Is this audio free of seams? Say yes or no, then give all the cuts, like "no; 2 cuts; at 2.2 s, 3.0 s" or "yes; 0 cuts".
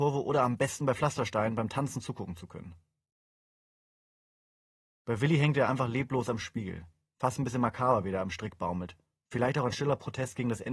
yes; 0 cuts